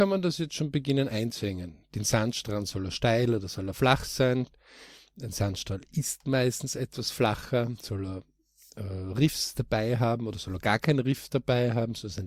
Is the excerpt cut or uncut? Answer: uncut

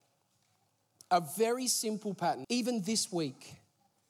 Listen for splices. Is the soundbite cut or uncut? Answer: cut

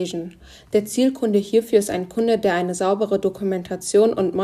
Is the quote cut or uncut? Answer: uncut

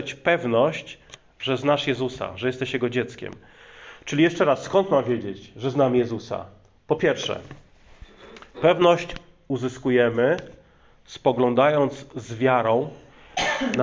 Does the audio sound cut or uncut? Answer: uncut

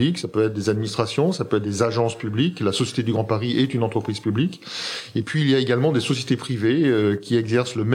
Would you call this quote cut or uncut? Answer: uncut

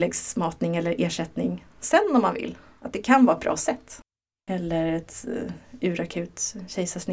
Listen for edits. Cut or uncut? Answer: cut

